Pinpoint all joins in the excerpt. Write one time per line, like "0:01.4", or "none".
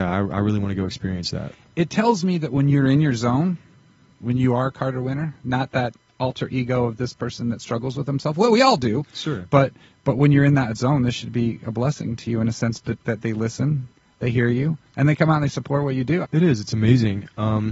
0:13.0
0:14.9
0:16.2